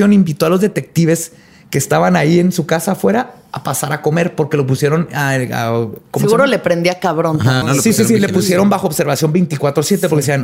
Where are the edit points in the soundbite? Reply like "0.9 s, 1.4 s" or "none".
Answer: 7.6 s